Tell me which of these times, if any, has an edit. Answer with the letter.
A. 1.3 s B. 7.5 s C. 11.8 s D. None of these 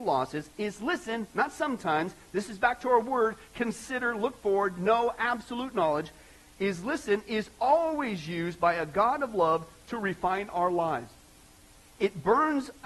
D